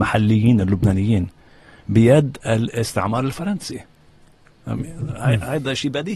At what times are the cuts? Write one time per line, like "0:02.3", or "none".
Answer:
none